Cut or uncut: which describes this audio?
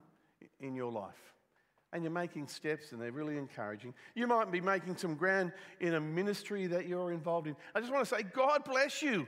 uncut